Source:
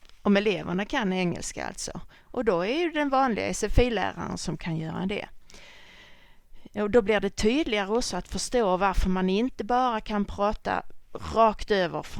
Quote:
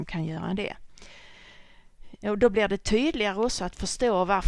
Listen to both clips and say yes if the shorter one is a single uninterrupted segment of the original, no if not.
yes